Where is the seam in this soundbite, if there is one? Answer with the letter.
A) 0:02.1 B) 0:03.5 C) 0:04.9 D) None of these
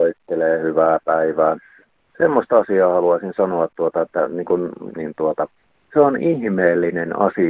C